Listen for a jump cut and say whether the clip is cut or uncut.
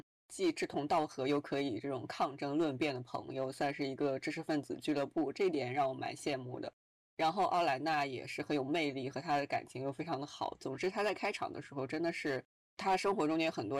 uncut